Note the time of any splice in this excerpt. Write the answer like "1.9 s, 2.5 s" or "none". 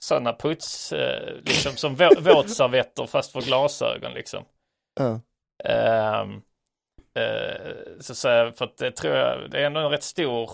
7.0 s